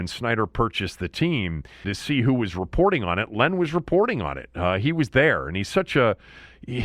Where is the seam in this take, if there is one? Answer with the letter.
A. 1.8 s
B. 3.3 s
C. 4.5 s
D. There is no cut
A